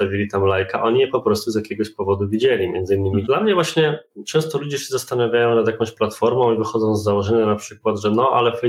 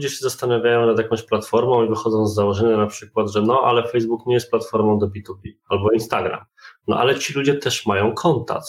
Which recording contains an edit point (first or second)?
first